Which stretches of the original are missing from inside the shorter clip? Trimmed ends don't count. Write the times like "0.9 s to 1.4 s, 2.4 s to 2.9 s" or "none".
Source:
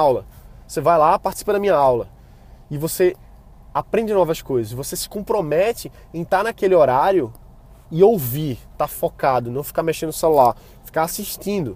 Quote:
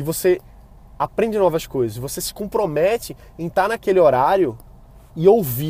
none

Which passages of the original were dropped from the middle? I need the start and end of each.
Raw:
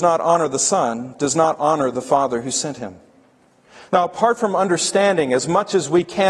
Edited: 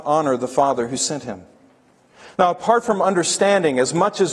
none

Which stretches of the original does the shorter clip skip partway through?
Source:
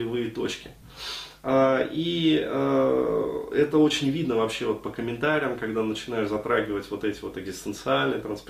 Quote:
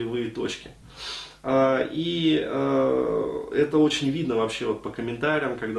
none

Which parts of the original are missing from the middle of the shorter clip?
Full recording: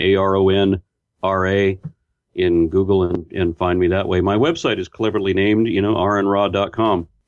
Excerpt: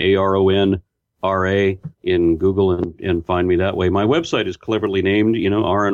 1.9 s to 2.3 s

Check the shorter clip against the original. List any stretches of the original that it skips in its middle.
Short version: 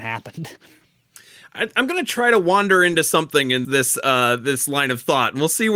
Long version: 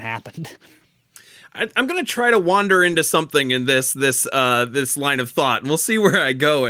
3.6 s to 3.9 s

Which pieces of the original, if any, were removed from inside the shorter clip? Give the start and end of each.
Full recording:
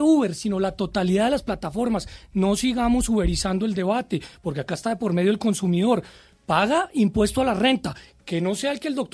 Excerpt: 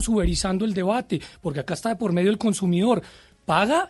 none

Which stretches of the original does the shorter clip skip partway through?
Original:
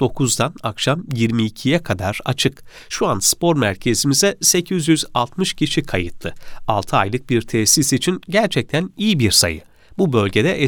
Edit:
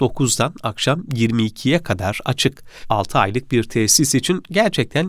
2.8 s to 6.6 s

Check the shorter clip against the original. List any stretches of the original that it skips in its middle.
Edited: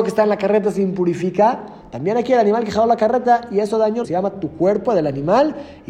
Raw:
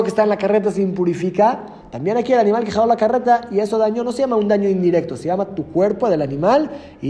4.0 s to 5.2 s

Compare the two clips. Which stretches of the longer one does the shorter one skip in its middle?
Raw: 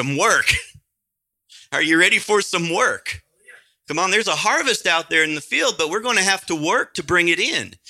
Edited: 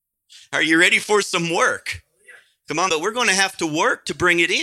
4.1 s to 5.8 s

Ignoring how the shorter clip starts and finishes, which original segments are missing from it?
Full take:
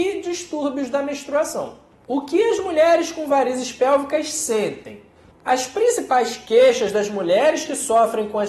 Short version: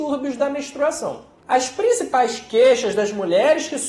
1.9 s to 5.4 s

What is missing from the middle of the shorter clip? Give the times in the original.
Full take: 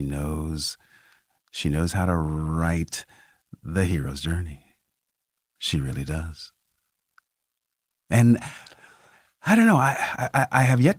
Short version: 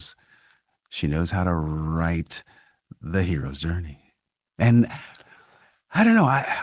5.1 s to 8.0 s

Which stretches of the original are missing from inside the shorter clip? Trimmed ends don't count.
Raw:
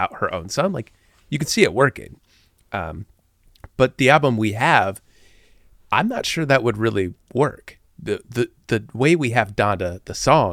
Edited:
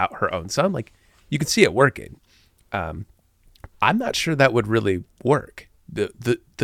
3.7 s to 5.8 s

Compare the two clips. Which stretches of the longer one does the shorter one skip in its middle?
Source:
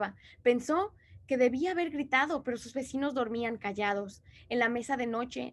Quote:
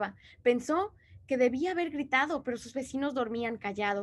none

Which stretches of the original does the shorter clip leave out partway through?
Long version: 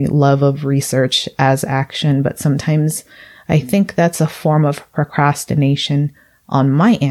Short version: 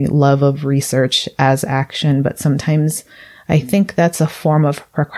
none

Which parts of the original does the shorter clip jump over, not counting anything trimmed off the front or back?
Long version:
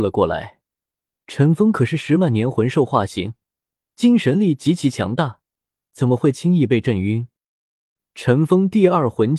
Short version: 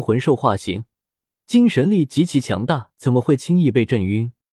5.4 s to 5.9 s

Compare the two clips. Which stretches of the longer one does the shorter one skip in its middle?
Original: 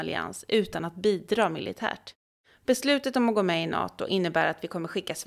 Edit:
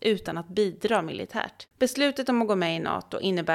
2.2 s to 2.6 s

